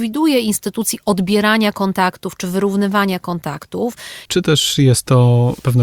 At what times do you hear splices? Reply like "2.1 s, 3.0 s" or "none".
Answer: 4.3 s